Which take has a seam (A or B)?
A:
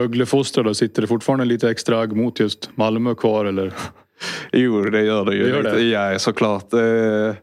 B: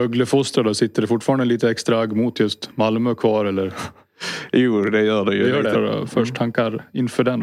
B